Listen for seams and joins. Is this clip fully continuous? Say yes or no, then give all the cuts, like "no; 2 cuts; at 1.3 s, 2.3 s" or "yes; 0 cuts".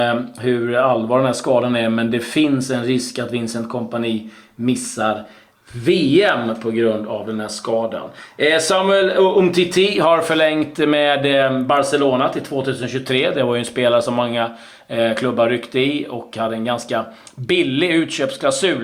yes; 0 cuts